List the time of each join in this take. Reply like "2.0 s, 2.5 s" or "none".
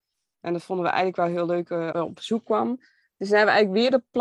1.9 s